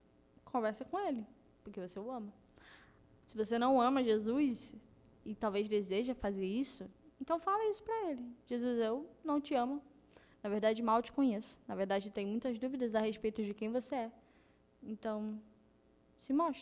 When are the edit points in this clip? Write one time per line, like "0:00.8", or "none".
none

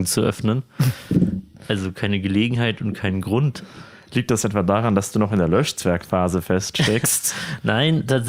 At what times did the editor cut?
none

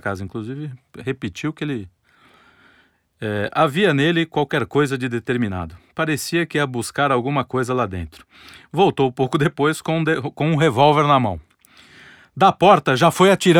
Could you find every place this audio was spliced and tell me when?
none

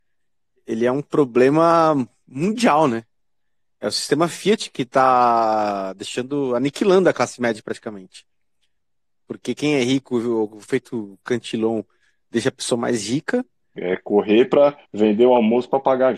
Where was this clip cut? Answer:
0:13.7
0:14.8

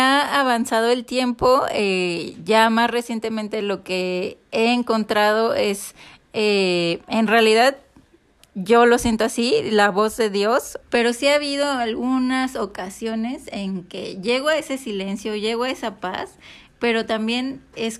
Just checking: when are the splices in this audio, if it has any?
0:10.8

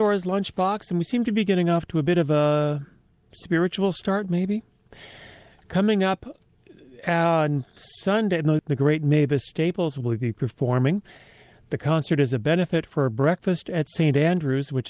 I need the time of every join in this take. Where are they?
0:08.6

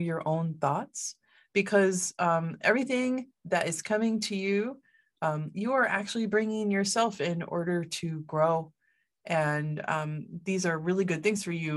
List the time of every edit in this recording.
none

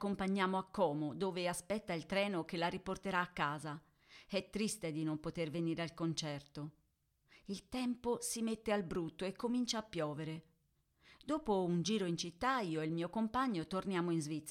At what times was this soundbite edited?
none

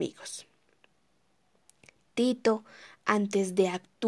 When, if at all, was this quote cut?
none

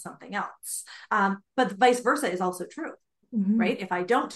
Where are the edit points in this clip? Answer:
none

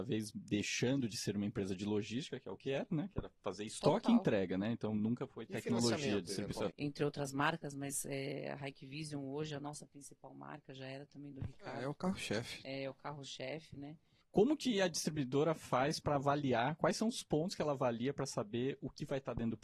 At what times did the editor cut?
0:06.7
0:14.2

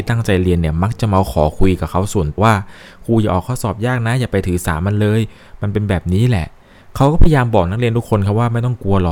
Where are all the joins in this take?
0:02.4

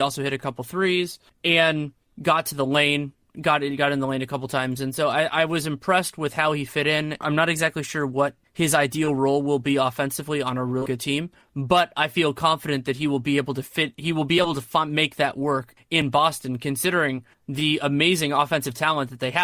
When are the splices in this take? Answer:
0:07.2
0:10.9

